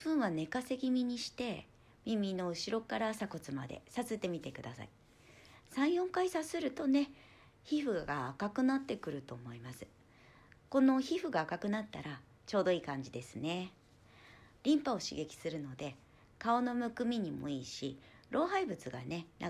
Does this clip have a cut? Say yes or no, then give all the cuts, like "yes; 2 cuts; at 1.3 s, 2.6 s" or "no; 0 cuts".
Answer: no; 0 cuts